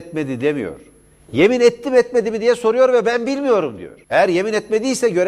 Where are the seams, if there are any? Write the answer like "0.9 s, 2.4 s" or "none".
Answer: 4.0 s